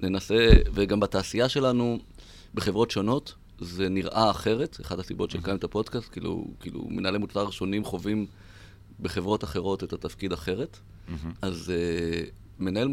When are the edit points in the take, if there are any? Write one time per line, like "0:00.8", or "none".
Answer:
0:11.4